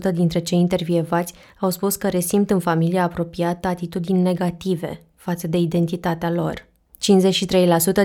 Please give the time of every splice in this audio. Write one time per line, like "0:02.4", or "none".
0:06.9